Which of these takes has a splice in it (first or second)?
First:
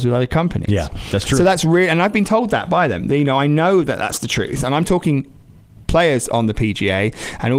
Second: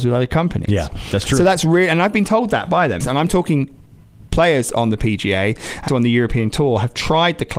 second